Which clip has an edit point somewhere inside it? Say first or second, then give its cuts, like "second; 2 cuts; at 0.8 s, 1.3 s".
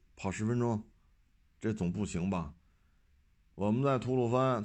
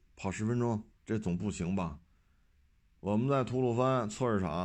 second; 1 cut; at 1.0 s